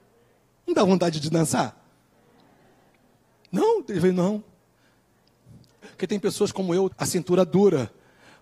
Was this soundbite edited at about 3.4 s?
no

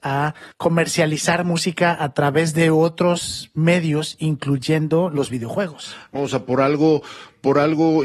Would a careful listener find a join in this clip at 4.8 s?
no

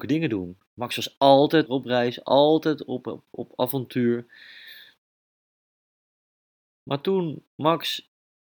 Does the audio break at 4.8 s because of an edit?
no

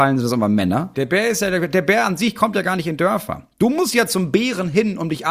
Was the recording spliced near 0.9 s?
yes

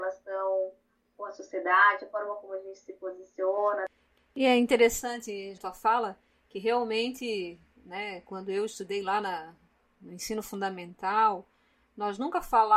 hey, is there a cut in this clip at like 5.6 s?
yes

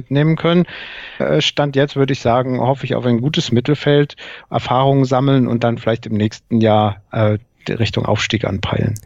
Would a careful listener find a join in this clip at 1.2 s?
yes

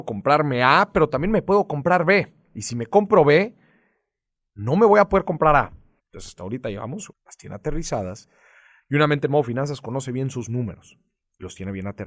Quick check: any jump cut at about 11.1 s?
no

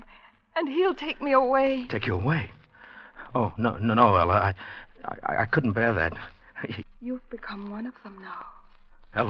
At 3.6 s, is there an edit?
yes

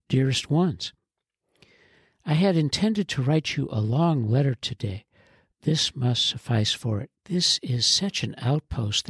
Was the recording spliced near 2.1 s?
no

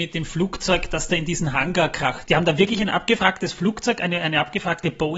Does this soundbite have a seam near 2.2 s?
yes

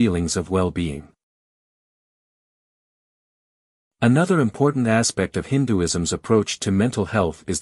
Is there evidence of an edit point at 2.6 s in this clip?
no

